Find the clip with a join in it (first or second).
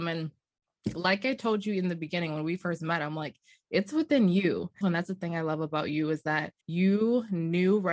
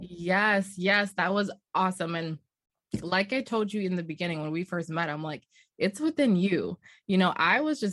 first